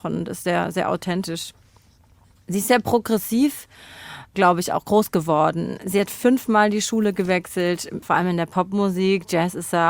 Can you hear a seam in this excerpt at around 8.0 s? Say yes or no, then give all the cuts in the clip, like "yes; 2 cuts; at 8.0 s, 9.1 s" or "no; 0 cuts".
yes; 1 cut; at 8.0 s